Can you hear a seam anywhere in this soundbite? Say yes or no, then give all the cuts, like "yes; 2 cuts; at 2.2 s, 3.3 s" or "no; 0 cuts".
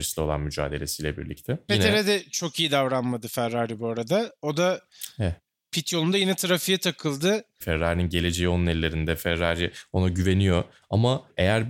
yes; 2 cuts; at 1.7 s, 7.6 s